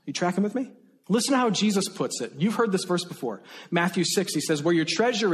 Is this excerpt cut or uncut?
cut